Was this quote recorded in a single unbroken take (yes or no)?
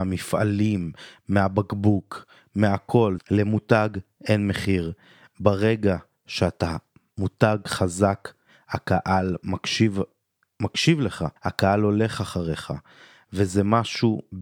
no